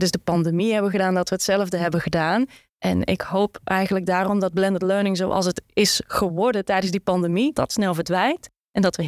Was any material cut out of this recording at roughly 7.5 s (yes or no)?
yes